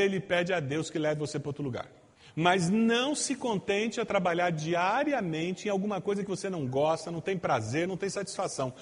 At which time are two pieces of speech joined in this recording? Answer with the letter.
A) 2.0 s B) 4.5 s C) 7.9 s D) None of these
C